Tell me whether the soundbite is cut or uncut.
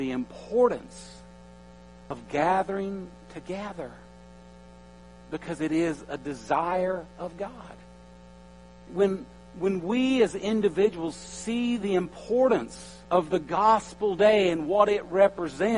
cut